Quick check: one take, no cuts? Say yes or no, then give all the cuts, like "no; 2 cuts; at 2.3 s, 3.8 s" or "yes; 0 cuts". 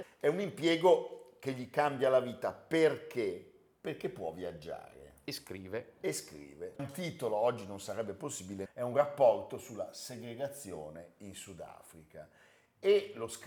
no; 2 cuts; at 6.8 s, 8.7 s